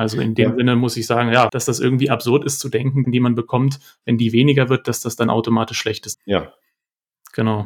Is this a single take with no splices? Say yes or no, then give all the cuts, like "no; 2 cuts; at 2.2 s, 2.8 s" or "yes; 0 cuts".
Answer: no; 3 cuts; at 1.5 s, 3.0 s, 6.1 s